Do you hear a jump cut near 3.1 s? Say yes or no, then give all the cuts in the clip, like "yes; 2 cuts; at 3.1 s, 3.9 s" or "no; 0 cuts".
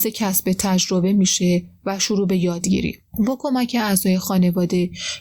yes; 1 cut; at 3.1 s